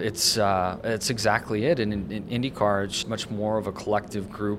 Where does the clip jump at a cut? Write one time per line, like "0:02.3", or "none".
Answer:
0:03.0